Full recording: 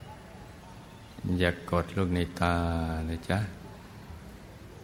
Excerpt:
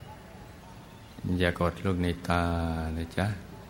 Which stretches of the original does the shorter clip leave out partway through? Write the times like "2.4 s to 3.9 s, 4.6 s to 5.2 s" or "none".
1.5 s to 1.7 s